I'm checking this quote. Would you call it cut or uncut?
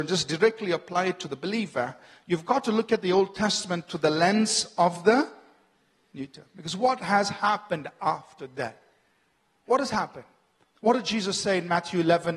uncut